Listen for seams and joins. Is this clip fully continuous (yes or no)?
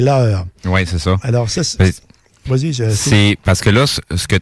yes